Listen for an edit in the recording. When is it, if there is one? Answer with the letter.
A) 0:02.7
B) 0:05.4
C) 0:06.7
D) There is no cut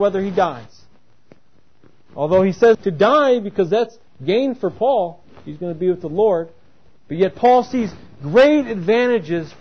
A